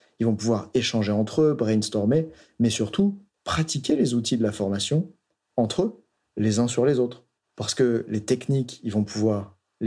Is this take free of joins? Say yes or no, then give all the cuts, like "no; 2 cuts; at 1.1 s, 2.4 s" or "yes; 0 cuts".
yes; 0 cuts